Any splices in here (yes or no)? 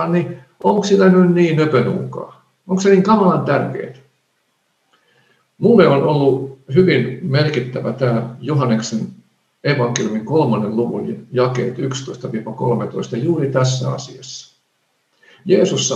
no